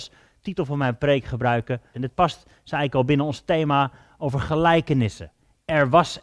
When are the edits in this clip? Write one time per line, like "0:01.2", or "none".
0:01.9